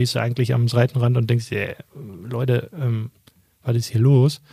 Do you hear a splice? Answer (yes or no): no